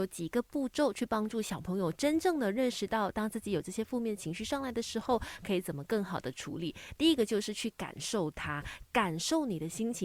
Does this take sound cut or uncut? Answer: uncut